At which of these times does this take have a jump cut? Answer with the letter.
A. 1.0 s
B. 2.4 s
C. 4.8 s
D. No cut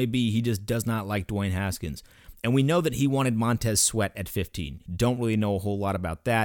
C